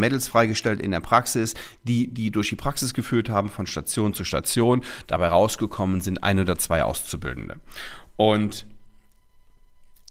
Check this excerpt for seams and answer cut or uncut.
uncut